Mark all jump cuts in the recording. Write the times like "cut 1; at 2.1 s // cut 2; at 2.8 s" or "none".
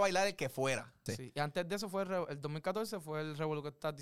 cut 1; at 1.1 s